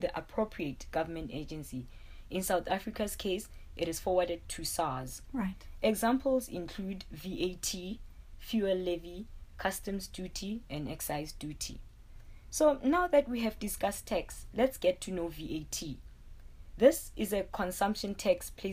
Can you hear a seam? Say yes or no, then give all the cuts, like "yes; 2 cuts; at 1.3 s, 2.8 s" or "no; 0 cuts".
no; 0 cuts